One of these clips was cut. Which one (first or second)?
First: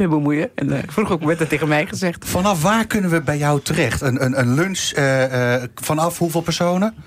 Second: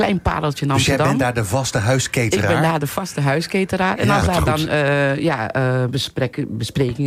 second